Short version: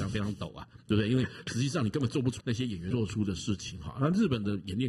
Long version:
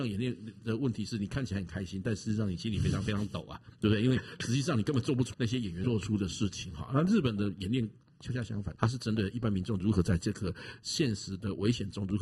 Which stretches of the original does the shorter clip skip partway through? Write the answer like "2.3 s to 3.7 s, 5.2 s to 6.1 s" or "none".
none